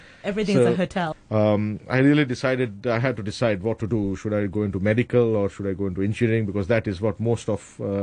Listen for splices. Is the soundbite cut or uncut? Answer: cut